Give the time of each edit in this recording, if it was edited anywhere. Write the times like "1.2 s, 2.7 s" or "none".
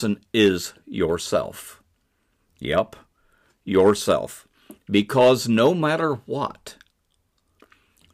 none